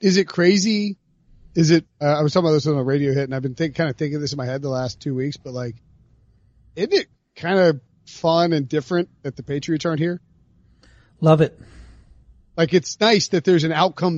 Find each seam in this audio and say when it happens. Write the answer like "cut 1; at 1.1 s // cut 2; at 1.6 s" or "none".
none